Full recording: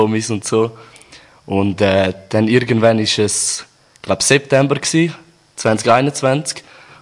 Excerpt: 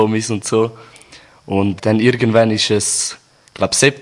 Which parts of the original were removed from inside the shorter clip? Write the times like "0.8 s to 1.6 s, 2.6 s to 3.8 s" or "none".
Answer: 1.8 s to 2.2 s